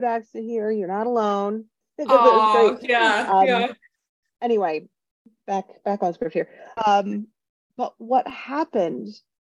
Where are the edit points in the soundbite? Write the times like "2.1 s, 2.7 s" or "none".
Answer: 1.8 s, 6.8 s